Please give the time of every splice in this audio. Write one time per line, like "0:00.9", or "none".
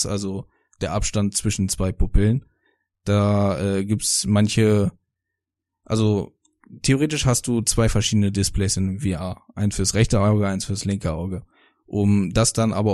none